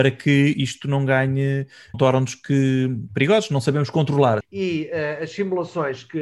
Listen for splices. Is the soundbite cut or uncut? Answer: cut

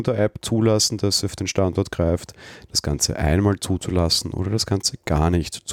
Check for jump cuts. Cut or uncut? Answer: uncut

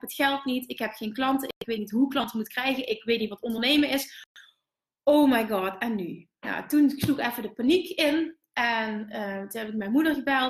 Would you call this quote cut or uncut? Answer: uncut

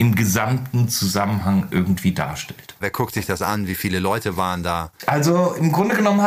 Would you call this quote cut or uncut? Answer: cut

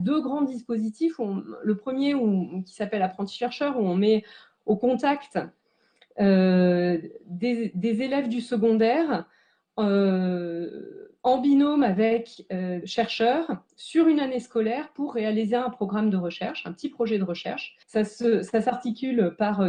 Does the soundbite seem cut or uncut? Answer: cut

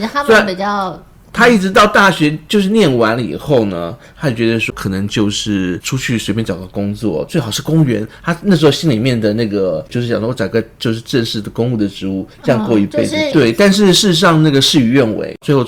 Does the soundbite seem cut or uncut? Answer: cut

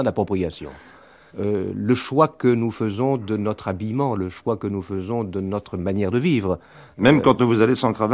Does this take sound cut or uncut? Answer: cut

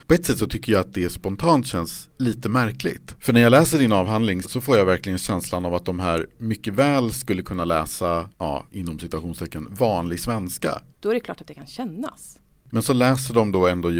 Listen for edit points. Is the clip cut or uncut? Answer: cut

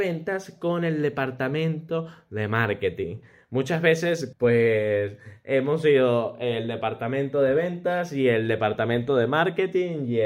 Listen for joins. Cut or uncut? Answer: cut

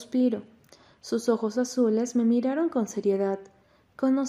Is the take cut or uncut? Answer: uncut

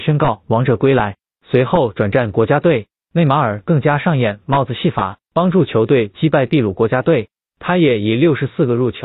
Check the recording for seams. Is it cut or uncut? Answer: uncut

